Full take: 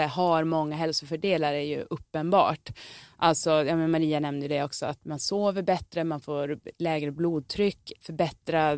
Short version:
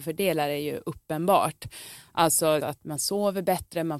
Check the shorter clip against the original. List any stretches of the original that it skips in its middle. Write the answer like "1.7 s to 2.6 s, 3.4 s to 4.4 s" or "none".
3.6 s to 4.8 s